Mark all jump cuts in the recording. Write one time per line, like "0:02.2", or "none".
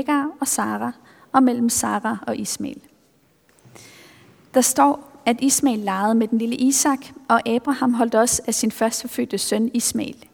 none